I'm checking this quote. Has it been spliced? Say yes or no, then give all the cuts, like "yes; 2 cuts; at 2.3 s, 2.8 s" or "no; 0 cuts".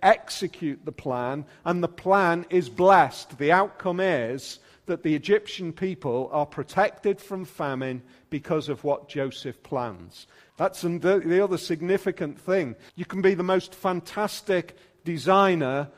yes; 2 cuts; at 10.5 s, 12.9 s